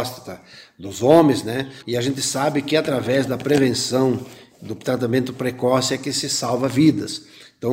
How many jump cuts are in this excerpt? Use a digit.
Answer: 1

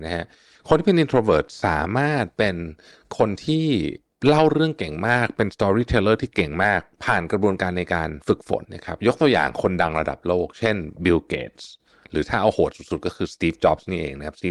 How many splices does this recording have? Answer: 1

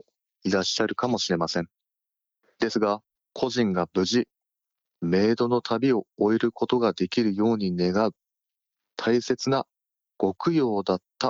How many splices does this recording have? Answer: 1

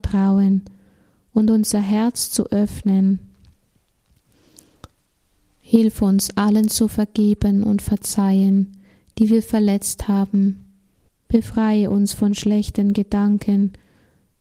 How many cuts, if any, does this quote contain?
1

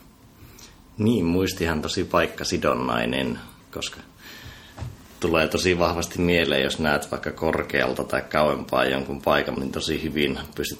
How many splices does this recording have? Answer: 2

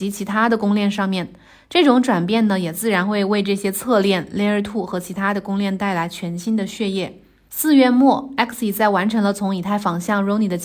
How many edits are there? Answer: 1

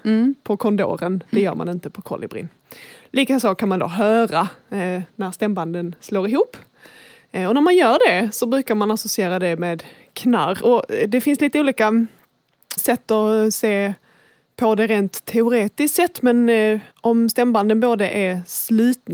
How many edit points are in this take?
2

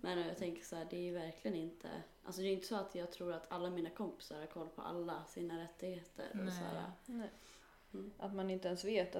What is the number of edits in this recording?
1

